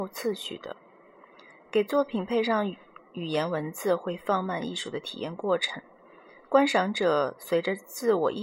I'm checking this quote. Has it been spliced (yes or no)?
no